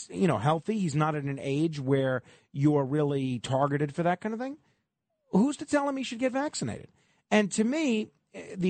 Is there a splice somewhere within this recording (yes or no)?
no